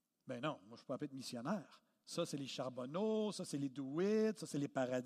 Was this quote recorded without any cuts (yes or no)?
yes